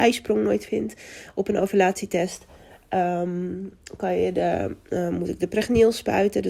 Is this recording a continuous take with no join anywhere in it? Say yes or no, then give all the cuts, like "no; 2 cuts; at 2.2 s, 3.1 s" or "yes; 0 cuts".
yes; 0 cuts